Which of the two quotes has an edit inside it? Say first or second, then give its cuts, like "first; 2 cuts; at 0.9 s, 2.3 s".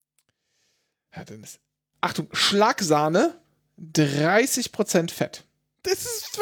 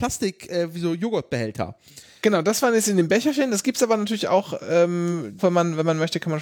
second; 1 cut; at 5.4 s